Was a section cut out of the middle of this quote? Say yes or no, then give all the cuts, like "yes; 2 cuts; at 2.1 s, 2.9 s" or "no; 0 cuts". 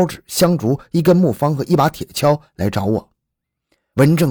no; 0 cuts